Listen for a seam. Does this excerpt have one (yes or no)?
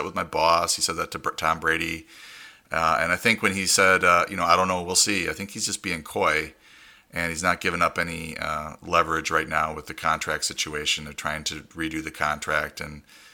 no